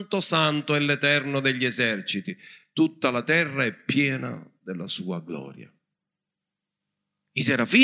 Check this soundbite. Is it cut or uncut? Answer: uncut